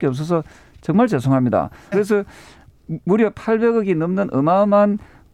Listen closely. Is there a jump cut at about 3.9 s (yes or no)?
no